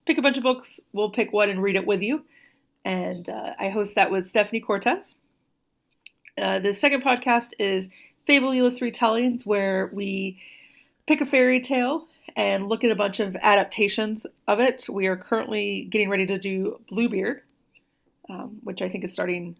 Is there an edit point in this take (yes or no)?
no